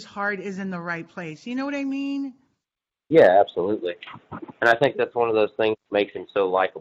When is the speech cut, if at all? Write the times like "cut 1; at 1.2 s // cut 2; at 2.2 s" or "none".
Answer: none